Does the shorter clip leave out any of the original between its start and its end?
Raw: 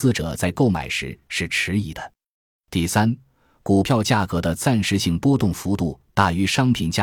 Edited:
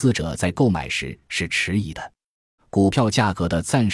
yes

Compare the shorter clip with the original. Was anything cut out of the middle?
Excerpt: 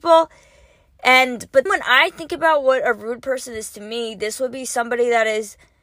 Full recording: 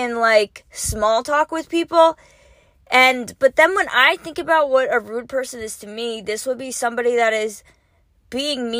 yes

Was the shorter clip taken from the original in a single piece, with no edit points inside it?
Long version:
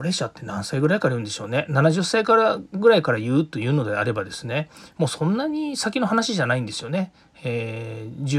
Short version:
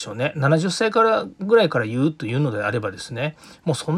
yes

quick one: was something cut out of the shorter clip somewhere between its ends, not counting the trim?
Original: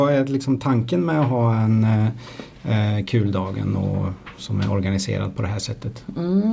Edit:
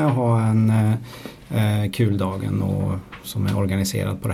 no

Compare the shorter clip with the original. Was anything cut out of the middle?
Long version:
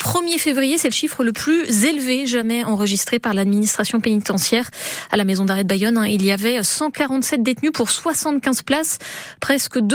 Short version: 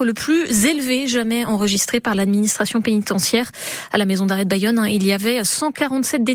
no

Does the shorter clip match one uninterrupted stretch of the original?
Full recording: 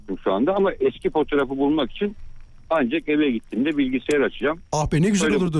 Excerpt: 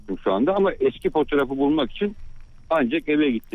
yes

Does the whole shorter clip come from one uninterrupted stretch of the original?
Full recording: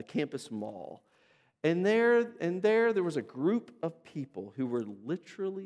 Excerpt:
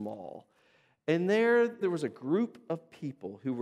no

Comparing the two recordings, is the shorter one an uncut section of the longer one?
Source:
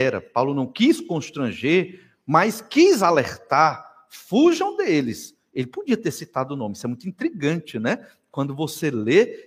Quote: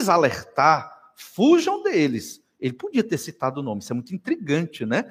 yes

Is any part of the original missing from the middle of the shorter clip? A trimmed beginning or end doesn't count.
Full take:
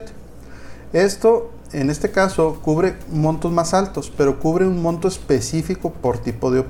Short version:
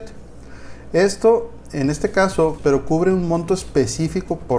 yes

